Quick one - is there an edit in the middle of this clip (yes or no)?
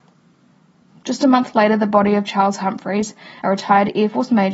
no